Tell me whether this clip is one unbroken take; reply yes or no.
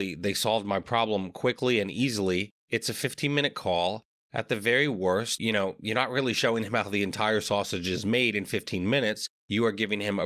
no